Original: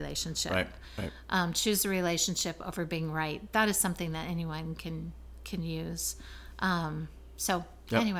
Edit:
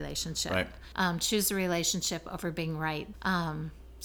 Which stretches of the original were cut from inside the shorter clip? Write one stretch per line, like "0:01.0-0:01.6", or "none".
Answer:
0:00.9-0:01.3
0:03.5-0:06.5